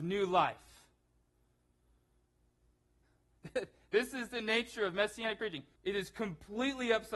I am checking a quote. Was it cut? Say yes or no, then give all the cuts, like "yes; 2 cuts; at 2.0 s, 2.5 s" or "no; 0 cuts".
yes; 2 cuts; at 3.0 s, 5.8 s